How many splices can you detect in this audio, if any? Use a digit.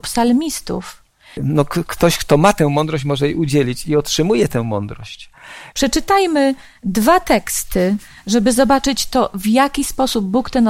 2